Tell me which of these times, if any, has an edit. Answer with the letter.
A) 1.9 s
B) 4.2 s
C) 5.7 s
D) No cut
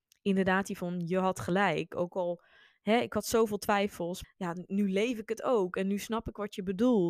B